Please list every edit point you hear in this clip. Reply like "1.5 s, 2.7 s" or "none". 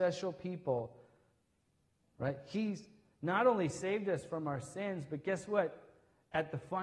2.0 s